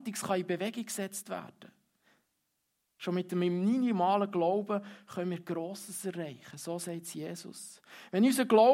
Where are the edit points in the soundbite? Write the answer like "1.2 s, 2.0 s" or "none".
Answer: none